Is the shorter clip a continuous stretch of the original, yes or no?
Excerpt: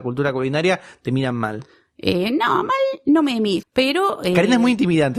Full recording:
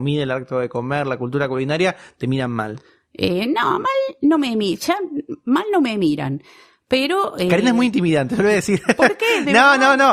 no